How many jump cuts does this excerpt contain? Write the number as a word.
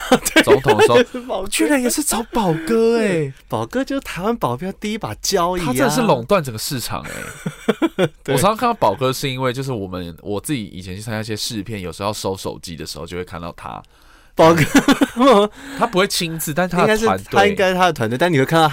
zero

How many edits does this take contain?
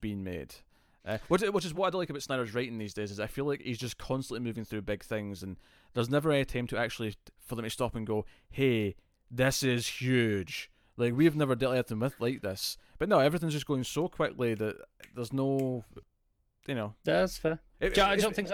one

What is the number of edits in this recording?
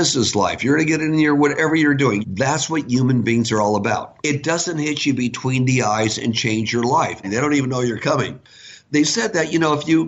three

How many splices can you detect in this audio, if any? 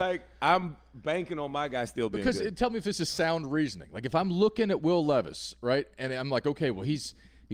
zero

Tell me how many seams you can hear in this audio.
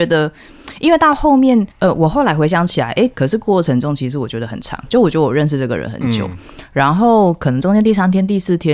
two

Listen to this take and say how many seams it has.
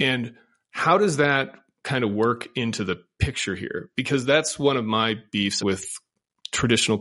one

